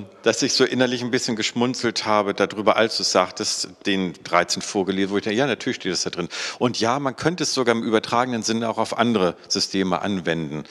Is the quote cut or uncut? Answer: uncut